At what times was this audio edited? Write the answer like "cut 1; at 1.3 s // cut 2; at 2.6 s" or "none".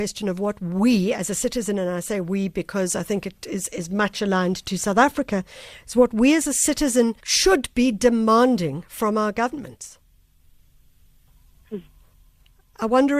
cut 1; at 7.2 s